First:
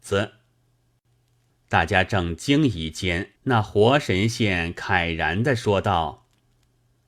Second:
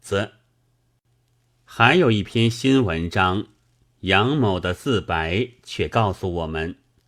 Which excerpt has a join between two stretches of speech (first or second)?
first